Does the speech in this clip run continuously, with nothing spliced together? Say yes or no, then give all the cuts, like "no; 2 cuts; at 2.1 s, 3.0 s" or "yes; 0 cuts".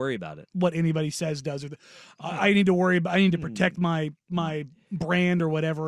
yes; 0 cuts